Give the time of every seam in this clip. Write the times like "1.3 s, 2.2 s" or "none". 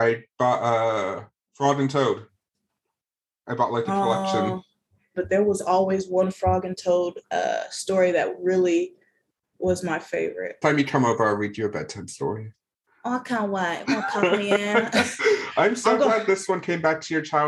5.1 s, 10.6 s